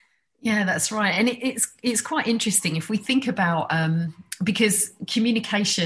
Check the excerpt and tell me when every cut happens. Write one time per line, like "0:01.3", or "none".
none

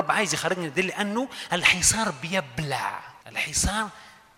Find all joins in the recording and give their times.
0:03.2

